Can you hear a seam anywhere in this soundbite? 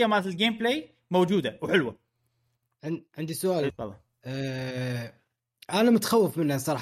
yes; 1 cut; at 3.7 s

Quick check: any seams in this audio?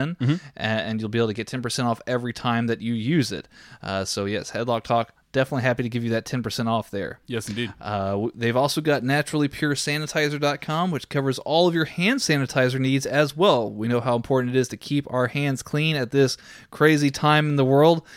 no; 0 cuts

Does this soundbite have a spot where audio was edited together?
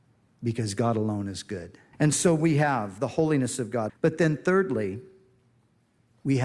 yes; 2 cuts; at 1.9 s, 3.9 s

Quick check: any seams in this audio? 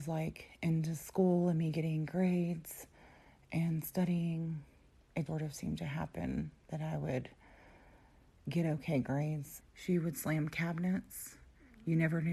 yes; 2 cuts; at 5.3 s, 9.6 s

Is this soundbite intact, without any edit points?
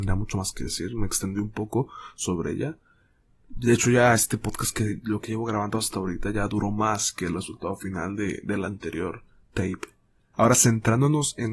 no; 1 cut; at 10.3 s

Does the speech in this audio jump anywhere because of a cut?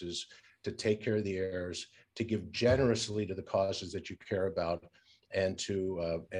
no; 0 cuts

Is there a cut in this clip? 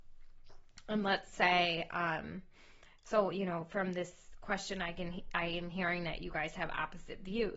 no; 0 cuts

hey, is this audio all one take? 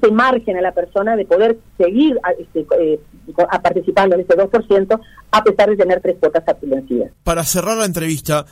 no; 1 cut; at 6.0 s

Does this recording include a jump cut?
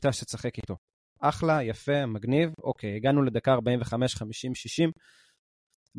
no; 0 cuts

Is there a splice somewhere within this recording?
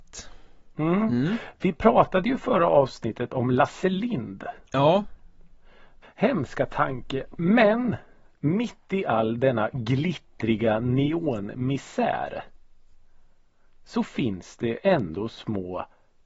yes; 1 cut; at 6.0 s

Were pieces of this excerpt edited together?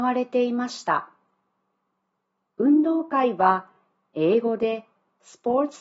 no; 0 cuts

